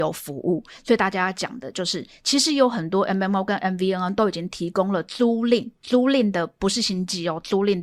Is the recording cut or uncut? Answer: uncut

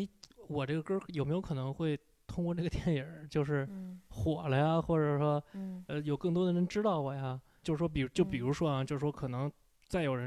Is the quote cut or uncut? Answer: cut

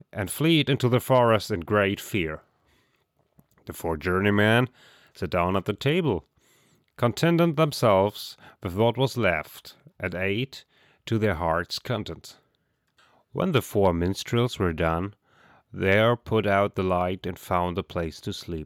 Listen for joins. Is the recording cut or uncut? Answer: uncut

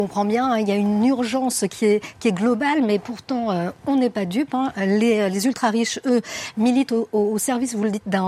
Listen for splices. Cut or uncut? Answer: uncut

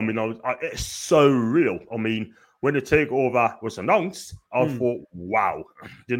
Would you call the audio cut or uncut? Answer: cut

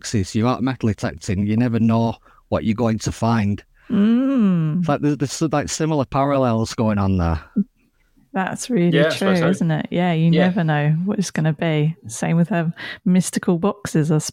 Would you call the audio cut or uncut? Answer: uncut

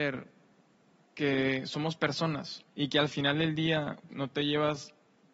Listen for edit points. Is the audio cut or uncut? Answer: cut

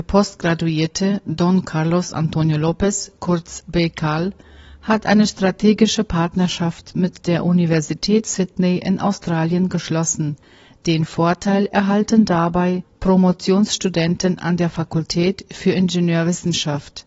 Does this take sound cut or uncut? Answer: uncut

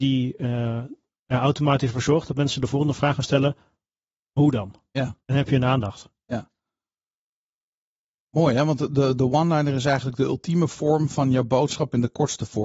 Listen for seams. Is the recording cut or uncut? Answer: cut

